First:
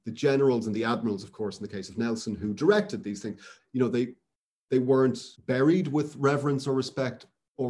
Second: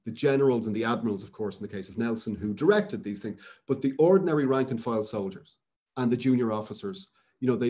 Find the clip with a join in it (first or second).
first